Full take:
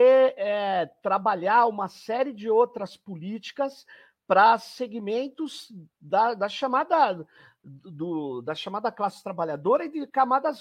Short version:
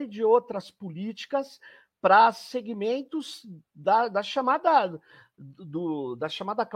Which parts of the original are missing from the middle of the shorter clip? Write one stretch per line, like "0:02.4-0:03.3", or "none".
none